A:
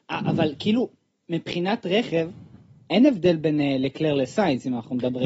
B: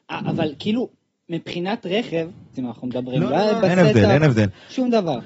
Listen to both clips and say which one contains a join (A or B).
B